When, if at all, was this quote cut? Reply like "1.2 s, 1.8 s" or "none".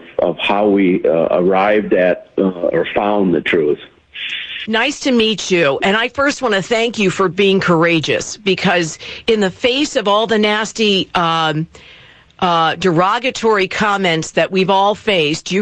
4.6 s